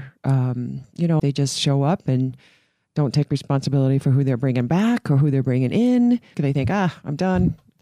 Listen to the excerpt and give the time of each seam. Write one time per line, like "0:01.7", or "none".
0:01.2
0:06.3